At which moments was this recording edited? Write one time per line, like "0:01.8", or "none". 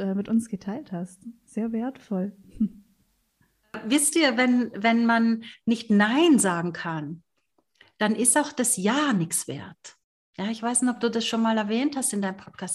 none

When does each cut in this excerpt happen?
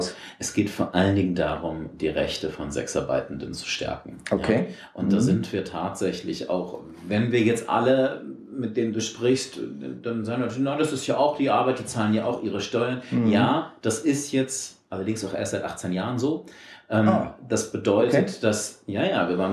none

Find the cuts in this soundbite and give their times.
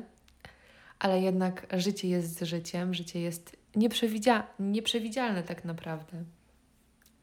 0:03.6

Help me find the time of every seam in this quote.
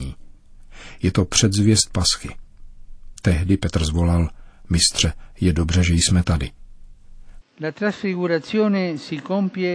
0:07.4

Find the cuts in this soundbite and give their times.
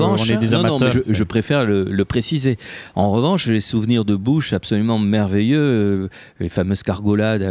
0:00.9

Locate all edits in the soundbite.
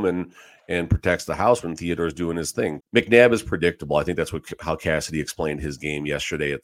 0:02.8

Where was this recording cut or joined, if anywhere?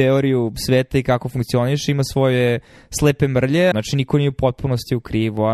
0:03.7

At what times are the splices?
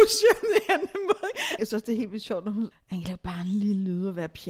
0:01.6
0:02.7

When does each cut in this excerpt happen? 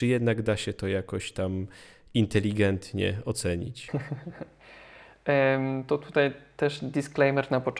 none

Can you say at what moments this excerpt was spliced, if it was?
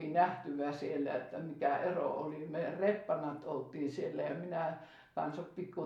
none

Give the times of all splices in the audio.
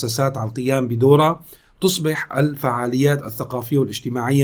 none

